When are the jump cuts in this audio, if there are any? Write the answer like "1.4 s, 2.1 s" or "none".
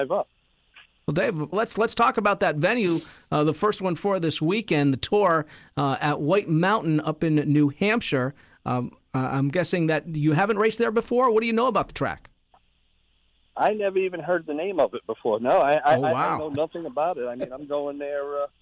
1.5 s